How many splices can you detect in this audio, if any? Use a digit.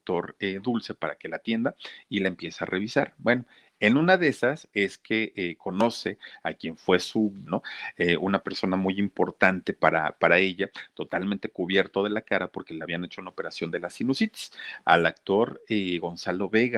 1